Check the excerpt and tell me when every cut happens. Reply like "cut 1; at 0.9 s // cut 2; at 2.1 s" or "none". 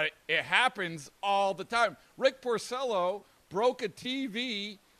none